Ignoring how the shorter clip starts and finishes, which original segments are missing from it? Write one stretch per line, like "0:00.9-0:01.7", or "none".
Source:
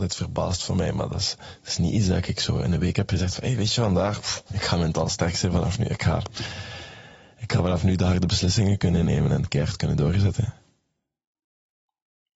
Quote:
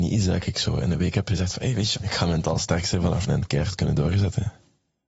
0:03.8-0:04.4
0:05.8-0:09.3